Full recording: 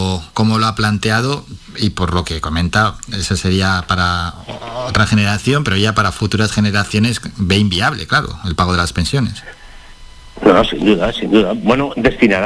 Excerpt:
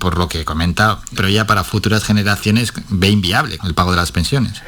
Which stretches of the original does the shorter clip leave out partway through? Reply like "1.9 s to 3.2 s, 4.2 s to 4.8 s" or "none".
3.1 s to 5.6 s, 8.1 s to 8.4 s

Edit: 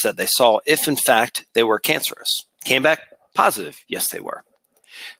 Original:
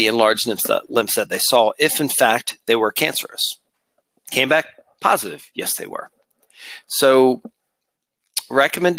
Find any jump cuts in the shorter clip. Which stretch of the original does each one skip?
3.7 s to 4.2 s

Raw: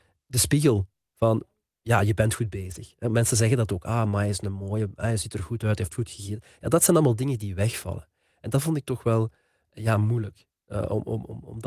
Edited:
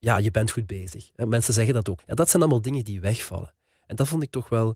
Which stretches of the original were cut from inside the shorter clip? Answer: 3.8 s to 6.5 s

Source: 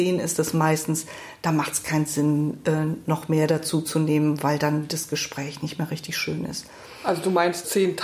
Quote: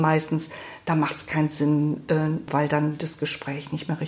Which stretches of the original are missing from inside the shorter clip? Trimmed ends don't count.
3.0 s to 4.4 s

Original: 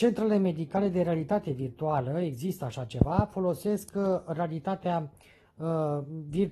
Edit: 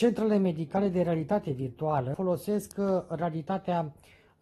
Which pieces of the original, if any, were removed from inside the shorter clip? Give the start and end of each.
2.1 s to 3.3 s

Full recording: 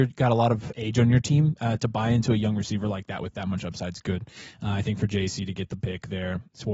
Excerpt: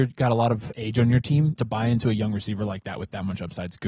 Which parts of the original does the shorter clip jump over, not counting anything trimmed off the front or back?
1.6 s to 1.8 s

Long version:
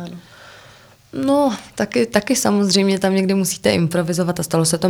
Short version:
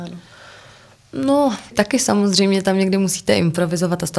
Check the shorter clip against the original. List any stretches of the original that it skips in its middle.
1.7 s to 2.1 s

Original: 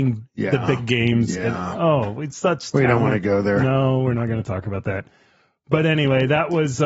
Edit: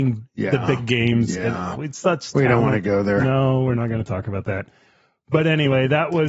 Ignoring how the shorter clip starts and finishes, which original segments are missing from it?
1.8 s to 2.1 s

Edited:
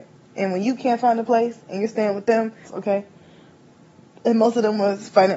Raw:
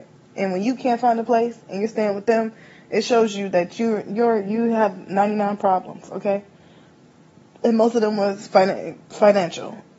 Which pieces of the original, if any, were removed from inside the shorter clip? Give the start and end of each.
2.6 s to 6.0 s

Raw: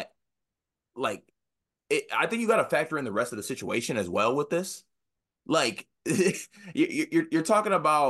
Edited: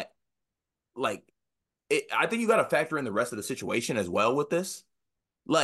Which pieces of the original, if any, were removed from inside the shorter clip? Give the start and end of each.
none

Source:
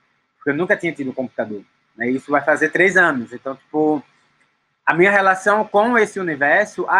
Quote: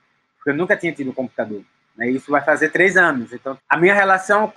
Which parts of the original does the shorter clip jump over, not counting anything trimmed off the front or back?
3.6 s to 4.7 s

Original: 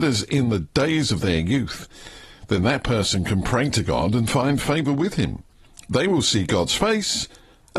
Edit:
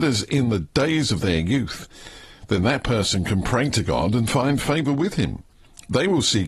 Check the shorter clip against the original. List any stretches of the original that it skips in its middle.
none

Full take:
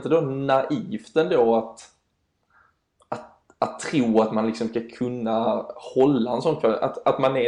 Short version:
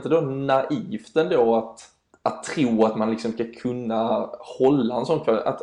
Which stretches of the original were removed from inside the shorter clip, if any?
2.1 s to 3.5 s

